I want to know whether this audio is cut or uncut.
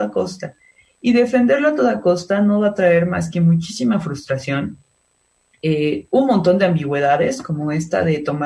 uncut